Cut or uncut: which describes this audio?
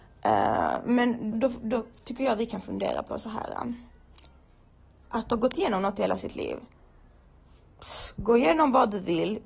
cut